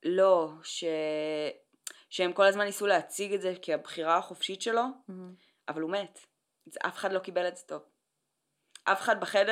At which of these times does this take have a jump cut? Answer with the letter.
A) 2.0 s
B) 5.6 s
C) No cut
C